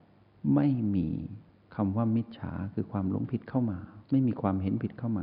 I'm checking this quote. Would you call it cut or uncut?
cut